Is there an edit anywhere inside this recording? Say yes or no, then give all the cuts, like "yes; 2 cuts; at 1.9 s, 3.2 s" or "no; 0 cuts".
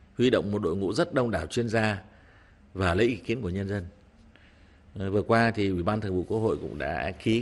no; 0 cuts